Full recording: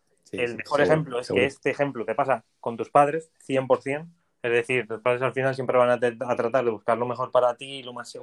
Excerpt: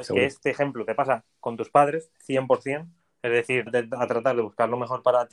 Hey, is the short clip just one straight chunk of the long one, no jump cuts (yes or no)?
no